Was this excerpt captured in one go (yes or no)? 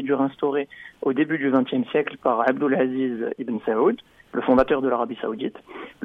yes